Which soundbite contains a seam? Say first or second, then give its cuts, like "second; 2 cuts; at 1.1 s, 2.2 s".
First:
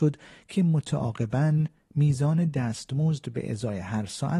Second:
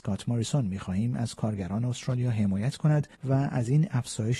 second; 1 cut; at 3.1 s